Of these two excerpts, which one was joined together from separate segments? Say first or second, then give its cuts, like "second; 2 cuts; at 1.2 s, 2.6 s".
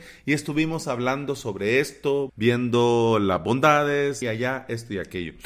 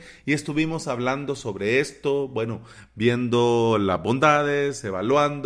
first; 2 cuts; at 2.3 s, 4.2 s